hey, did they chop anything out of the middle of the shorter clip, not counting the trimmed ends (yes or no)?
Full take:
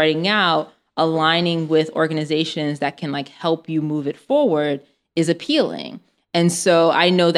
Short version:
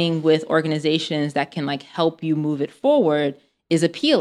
no